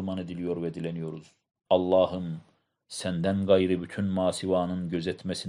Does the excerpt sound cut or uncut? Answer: cut